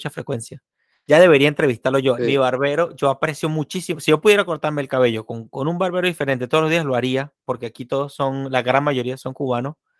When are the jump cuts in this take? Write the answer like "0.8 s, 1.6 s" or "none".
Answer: 2.2 s

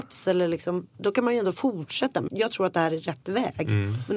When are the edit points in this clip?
2.3 s

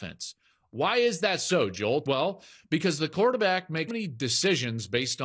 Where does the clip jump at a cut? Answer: 2.0 s, 3.9 s

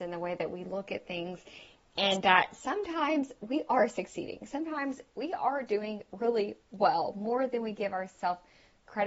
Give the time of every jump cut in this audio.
none

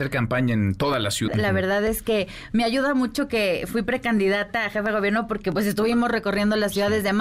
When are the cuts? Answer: 1.3 s

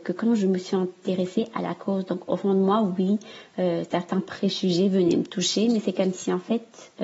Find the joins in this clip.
none

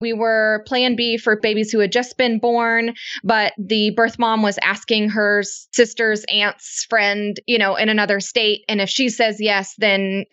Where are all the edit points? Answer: none

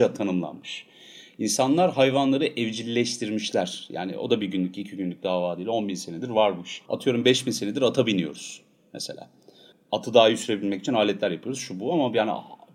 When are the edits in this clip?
6.9 s

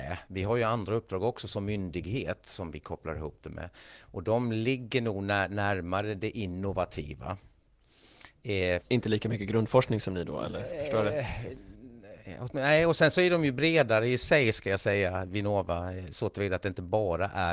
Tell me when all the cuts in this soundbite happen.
8.8 s

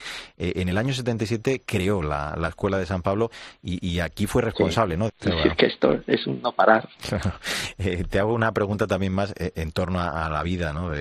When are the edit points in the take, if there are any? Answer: 5.1 s

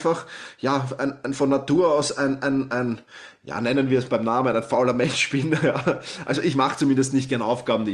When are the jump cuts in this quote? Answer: none

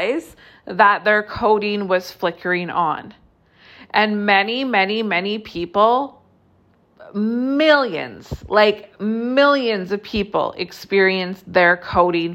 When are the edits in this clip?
none

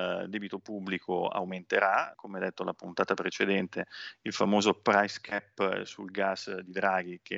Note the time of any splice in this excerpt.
2.1 s

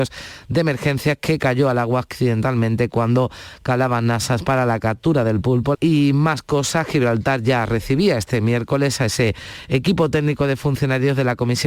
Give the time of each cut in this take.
5.7 s

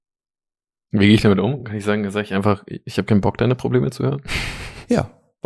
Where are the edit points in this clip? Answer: none

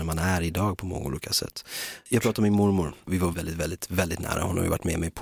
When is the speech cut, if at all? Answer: 3.3 s

